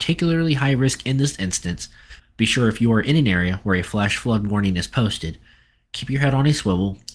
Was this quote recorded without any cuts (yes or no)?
no